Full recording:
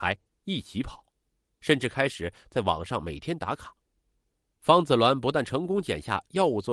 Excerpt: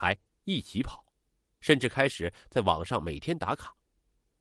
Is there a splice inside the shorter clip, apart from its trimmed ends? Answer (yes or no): no